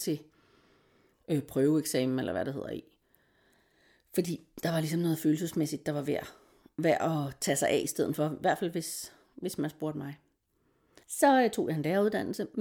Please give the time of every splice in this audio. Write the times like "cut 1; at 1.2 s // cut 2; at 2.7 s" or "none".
cut 1; at 11.0 s